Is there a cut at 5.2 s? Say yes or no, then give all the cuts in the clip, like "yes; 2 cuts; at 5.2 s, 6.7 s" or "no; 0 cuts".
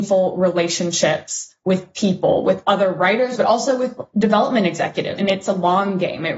yes; 2 cuts; at 3.4 s, 5.2 s